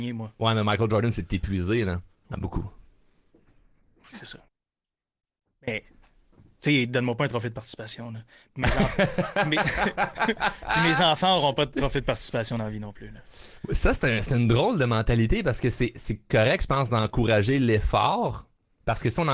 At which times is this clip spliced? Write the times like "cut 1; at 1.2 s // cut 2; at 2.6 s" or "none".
cut 1; at 2.3 s